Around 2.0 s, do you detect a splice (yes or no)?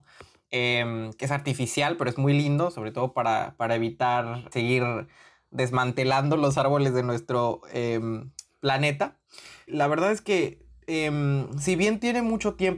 no